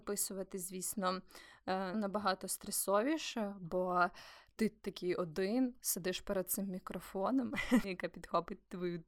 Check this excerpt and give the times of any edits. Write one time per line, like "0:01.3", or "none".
0:01.9
0:07.8